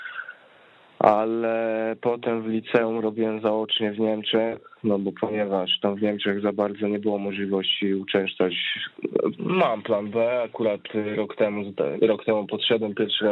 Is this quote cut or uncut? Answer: cut